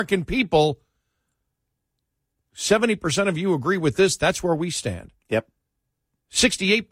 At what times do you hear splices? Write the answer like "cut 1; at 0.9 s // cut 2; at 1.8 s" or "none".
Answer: none